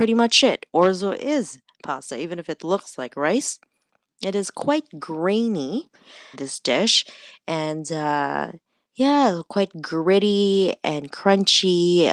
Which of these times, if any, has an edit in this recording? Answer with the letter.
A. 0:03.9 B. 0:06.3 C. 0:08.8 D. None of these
B